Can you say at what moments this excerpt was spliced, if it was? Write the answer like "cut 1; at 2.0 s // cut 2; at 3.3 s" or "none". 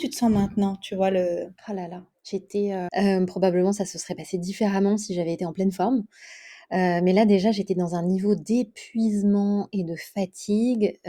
cut 1; at 1.6 s // cut 2; at 2.9 s